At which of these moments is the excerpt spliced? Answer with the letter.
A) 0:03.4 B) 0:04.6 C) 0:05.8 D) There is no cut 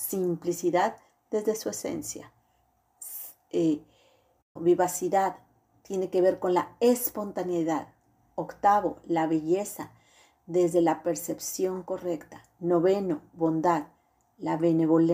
B